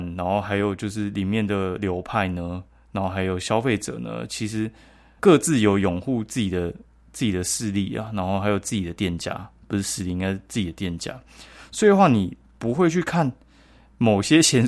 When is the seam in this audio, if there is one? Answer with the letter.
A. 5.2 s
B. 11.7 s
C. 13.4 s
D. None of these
A